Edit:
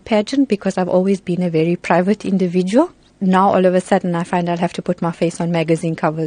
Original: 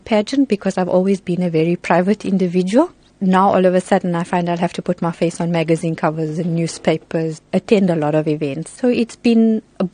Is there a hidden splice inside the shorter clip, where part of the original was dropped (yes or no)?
no